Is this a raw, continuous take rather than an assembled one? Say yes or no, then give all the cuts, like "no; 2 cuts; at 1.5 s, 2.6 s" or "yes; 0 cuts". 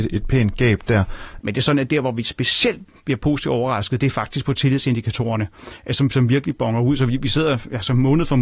no; 1 cut; at 1.4 s